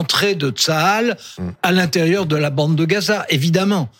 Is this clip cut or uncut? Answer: uncut